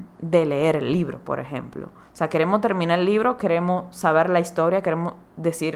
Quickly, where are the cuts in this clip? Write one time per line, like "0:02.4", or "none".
none

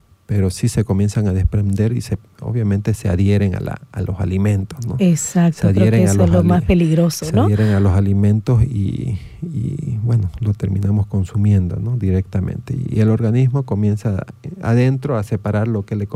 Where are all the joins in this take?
none

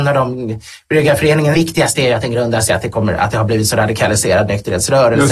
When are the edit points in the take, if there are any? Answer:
0:01.5
0:02.7

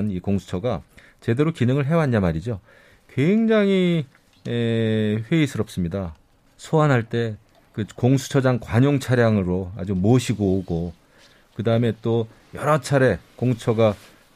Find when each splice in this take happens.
0:06.5

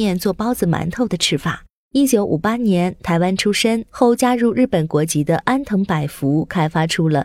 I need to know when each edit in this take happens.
none

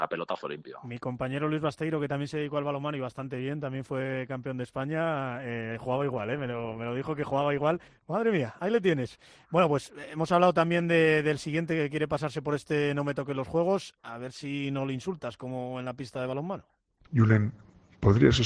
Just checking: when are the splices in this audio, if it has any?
0:07.9
0:17.1

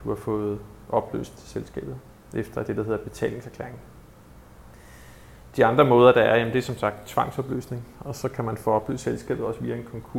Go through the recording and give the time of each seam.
none

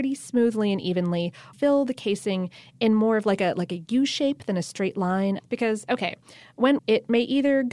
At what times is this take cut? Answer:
0:01.5
0:05.4
0:06.8

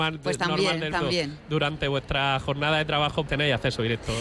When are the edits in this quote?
0:00.9
0:03.3

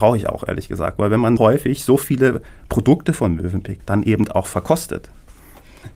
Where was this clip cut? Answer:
0:01.4
0:03.8

